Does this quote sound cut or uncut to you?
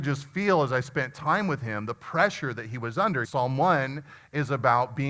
cut